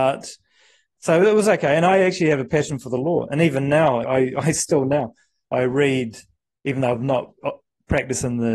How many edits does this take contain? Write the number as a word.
one